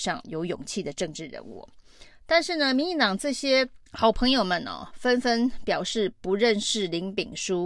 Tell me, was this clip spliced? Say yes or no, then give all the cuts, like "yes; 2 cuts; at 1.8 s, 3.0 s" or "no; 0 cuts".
yes; 1 cut; at 3.9 s